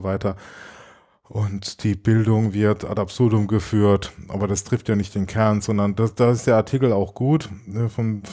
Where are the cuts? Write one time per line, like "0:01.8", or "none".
none